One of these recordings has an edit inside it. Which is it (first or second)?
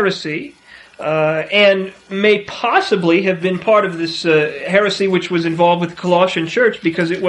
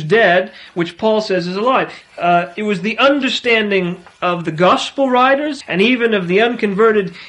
second